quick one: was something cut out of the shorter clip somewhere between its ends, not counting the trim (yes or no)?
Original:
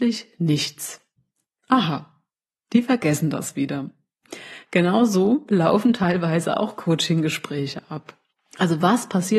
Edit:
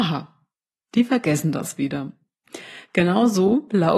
no